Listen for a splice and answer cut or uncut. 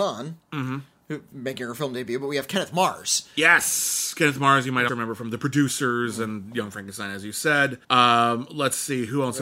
cut